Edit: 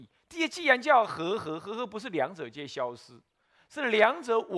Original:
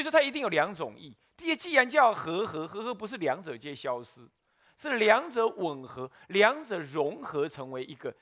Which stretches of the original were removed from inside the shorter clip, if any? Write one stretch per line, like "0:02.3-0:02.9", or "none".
none